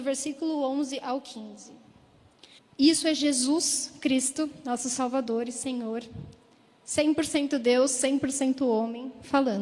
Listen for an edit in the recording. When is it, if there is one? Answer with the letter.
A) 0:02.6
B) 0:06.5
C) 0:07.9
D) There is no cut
A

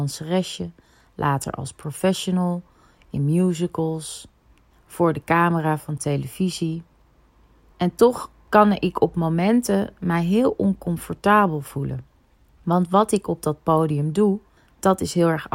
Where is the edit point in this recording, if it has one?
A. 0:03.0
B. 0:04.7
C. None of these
B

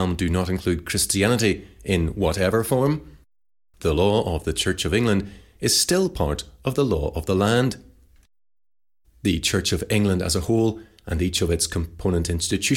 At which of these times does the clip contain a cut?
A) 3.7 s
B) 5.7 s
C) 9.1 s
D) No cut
A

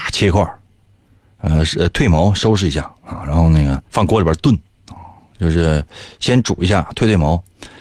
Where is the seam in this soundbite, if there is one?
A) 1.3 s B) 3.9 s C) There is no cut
B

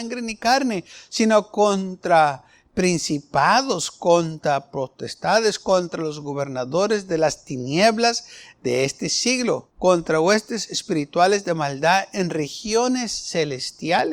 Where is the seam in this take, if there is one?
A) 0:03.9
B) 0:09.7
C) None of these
B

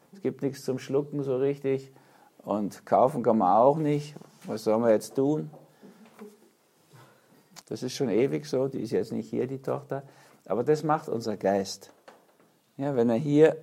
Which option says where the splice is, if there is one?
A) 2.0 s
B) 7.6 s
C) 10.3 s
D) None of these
B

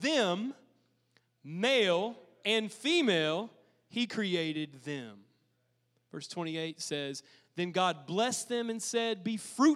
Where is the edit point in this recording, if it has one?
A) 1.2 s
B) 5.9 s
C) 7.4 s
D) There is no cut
D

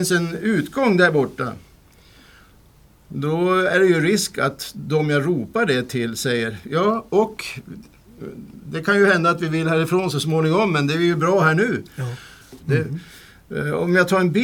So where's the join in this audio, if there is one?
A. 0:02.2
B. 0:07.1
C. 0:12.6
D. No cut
C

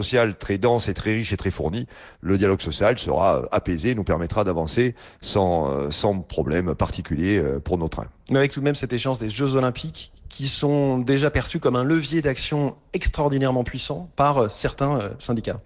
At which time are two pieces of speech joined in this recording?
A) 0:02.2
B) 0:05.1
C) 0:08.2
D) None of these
D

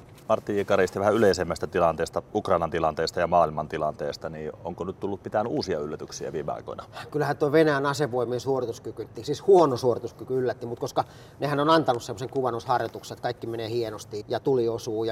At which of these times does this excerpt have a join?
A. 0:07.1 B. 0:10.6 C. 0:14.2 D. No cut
C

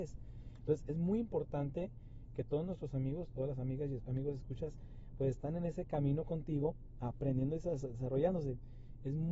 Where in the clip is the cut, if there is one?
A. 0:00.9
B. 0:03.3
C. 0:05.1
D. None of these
B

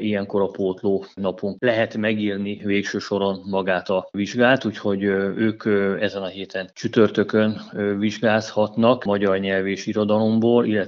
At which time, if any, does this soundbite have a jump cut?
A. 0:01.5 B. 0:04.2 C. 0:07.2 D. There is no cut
D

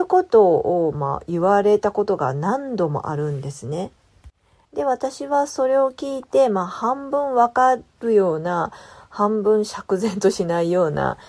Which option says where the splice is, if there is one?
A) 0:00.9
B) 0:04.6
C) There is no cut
B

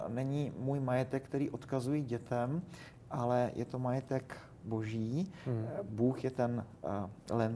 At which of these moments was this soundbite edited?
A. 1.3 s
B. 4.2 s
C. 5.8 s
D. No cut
D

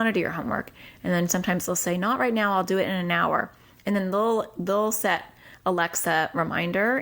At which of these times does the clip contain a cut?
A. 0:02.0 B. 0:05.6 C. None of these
C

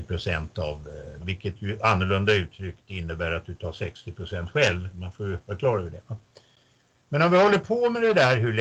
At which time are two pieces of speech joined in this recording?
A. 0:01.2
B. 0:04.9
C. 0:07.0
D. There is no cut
A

